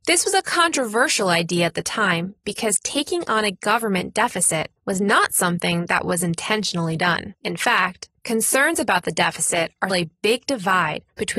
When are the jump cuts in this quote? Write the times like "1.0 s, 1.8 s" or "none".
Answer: 9.9 s